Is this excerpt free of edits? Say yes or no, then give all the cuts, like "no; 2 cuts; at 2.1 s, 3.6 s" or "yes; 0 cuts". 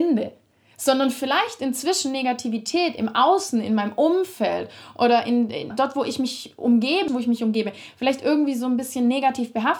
no; 2 cuts; at 5.7 s, 7.1 s